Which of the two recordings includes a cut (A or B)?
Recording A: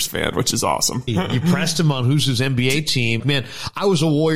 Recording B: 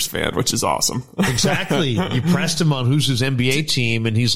A